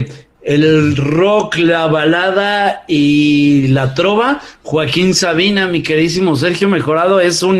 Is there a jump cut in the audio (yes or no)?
no